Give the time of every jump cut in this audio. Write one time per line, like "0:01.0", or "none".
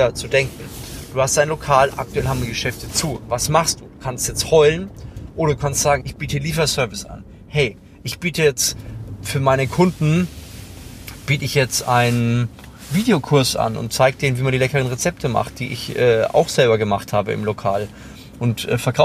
0:06.0